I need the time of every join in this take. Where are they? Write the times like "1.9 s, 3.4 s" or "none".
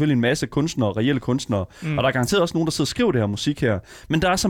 none